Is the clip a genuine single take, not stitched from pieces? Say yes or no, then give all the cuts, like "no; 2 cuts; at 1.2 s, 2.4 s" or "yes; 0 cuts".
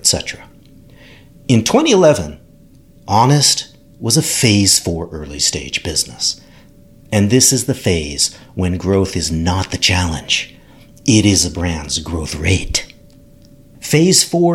yes; 0 cuts